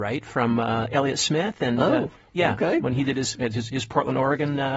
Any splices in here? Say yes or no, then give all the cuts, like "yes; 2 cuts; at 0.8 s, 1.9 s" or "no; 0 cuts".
no; 0 cuts